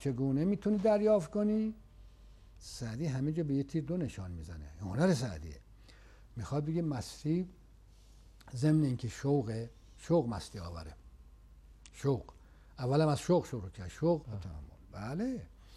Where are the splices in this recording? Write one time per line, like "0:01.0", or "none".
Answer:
0:02.6
0:14.2